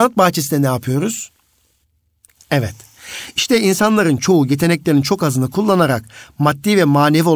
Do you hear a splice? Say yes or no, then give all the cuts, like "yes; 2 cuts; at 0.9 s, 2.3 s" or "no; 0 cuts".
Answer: no; 0 cuts